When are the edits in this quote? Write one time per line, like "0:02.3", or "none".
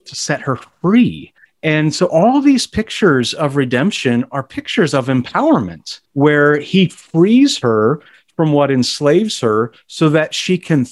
0:01.5
0:06.0